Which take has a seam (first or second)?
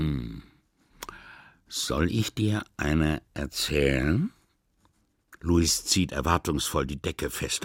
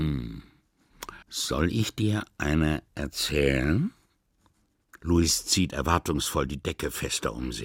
second